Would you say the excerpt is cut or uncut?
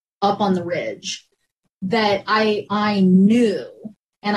cut